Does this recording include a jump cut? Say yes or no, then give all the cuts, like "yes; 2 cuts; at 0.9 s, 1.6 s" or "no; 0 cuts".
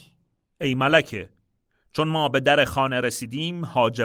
no; 0 cuts